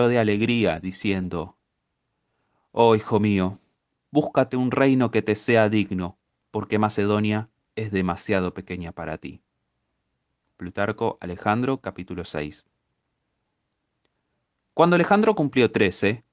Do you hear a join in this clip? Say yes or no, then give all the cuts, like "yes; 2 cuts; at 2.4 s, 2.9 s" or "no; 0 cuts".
no; 0 cuts